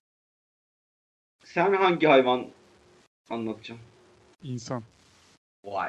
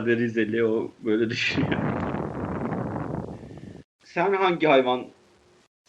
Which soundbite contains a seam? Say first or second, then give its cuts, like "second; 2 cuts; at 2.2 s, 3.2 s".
second; 1 cut; at 3.8 s